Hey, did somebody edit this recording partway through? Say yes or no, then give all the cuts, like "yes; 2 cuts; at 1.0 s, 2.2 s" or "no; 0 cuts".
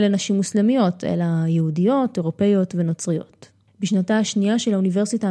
yes; 1 cut; at 3.6 s